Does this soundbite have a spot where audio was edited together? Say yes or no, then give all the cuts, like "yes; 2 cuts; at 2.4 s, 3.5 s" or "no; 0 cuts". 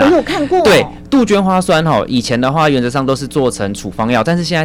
no; 0 cuts